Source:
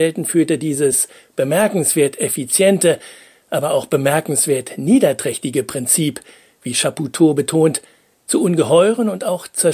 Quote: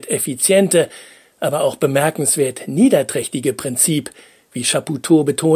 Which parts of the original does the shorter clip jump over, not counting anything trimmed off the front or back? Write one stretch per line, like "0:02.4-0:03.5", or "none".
none

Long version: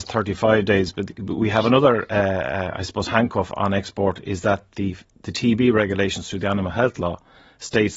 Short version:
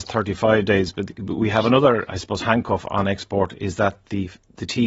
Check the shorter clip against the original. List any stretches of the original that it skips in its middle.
0:02.1-0:02.7

